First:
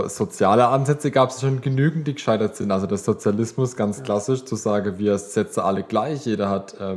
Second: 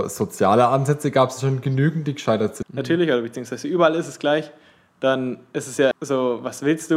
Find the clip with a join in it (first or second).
second